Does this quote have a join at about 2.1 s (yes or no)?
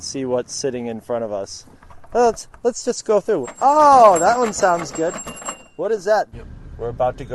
no